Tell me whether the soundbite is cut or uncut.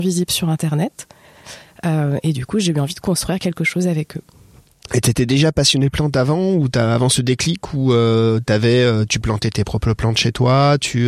uncut